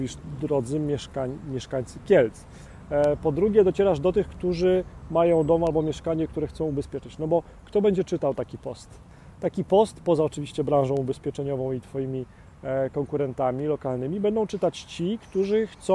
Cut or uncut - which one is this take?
uncut